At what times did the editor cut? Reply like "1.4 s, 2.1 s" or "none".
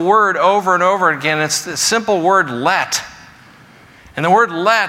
none